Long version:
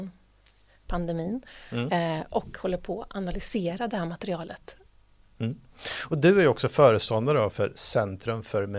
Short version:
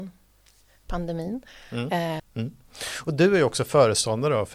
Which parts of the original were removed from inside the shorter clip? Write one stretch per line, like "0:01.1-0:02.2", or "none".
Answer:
0:02.2-0:05.2